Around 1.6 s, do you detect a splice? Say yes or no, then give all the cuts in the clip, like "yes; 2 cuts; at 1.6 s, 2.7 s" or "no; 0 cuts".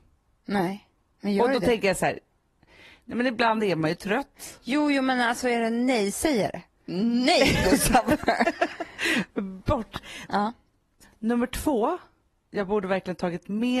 no; 1 cut; at 10.3 s